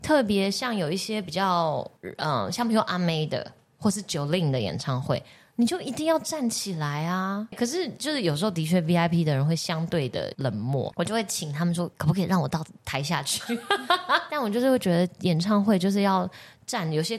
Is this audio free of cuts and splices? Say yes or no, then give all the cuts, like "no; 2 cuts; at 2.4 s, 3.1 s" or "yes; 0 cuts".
yes; 0 cuts